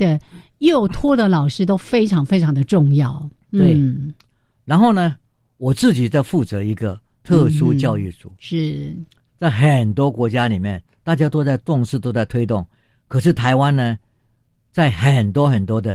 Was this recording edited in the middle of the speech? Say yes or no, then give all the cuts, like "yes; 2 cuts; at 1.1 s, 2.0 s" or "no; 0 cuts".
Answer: no; 0 cuts